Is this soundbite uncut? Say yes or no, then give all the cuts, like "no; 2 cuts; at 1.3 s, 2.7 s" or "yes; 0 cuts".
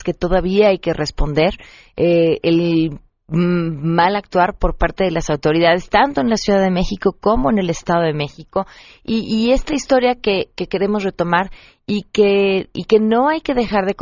yes; 0 cuts